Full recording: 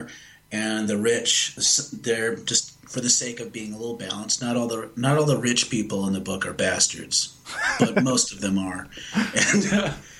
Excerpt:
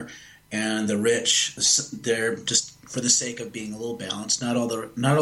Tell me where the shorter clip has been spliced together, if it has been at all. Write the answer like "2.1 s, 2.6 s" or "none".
none